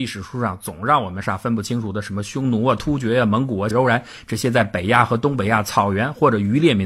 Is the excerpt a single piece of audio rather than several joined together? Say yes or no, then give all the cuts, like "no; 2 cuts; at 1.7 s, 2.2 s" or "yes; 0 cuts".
no; 2 cuts; at 1.2 s, 3.7 s